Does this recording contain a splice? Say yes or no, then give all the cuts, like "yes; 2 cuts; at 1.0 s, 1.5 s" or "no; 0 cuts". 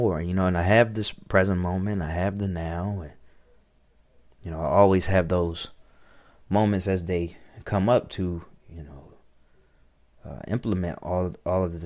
no; 0 cuts